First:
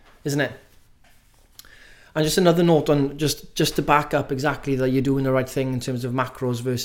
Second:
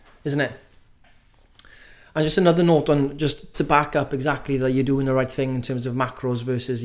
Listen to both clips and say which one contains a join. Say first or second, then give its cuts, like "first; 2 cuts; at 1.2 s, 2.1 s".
second; 1 cut; at 3.5 s